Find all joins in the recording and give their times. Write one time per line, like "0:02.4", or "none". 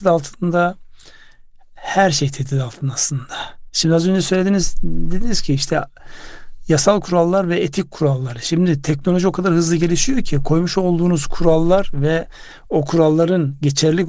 none

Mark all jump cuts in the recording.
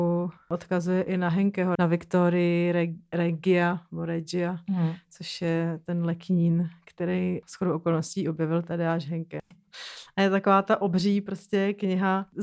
0:01.8
0:09.5

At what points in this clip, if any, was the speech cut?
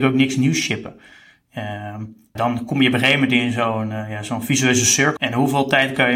0:02.4
0:05.2

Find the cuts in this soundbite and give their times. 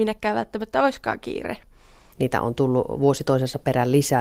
0:02.1

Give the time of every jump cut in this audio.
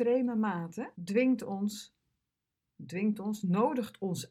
0:01.0

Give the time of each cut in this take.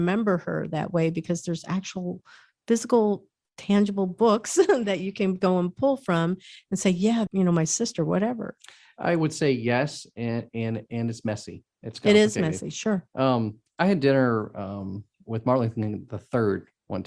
0:07.3

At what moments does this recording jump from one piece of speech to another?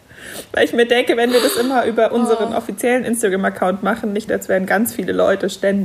0:04.3

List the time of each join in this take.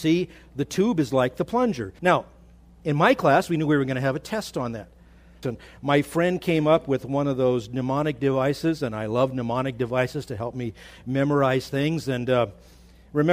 0:02.0
0:05.4

